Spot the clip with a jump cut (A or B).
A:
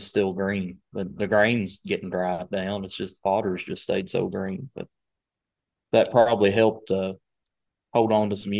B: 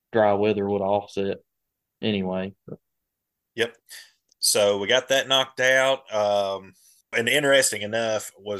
B